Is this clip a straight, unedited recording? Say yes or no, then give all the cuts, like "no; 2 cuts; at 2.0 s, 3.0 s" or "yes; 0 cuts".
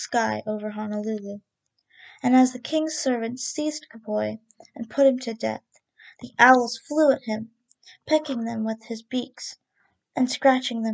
yes; 0 cuts